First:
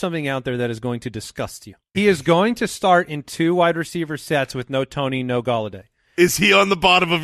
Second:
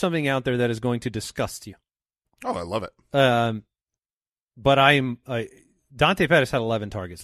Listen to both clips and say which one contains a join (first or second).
first